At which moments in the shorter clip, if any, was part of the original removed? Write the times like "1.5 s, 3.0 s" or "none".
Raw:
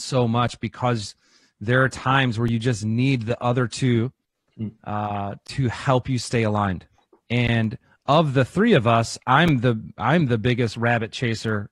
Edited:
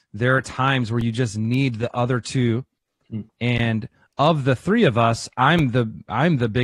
3.3 s